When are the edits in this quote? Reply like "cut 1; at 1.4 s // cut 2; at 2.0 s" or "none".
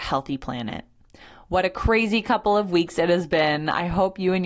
none